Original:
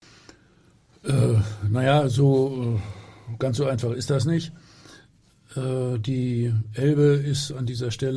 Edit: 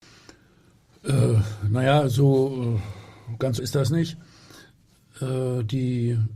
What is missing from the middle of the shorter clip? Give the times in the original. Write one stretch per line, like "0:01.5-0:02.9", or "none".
0:03.6-0:03.9